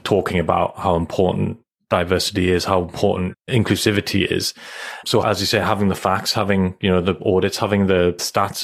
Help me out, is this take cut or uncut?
uncut